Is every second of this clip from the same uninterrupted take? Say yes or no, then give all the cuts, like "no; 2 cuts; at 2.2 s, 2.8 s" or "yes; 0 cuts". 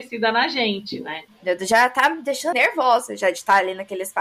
no; 2 cuts; at 1.3 s, 2.5 s